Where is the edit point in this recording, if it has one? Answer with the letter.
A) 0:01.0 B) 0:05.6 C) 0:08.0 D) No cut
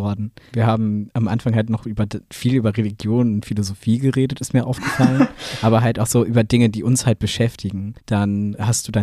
C